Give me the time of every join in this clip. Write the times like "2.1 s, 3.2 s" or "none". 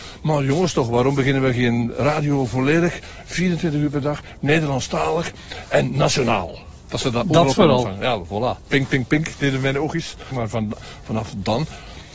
10.3 s